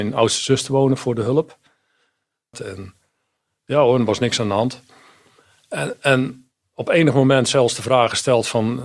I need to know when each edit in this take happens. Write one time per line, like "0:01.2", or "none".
0:02.5